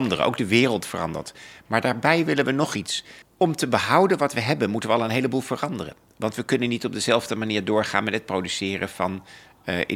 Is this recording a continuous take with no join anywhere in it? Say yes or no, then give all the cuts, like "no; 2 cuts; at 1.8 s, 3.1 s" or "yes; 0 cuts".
no; 1 cut; at 3.2 s